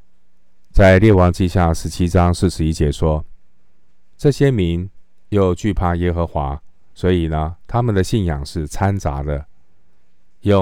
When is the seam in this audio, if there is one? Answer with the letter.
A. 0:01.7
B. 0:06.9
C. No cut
B